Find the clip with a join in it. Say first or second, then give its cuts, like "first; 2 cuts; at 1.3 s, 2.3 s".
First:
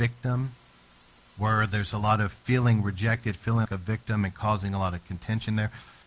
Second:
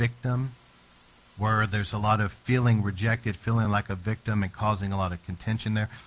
first; 1 cut; at 3.7 s